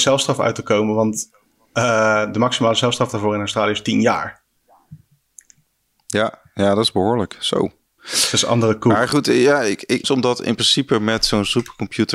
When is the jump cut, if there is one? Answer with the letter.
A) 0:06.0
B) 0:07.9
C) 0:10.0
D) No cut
C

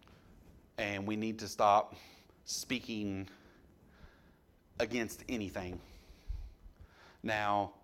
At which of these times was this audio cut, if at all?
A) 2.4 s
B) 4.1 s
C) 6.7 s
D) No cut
D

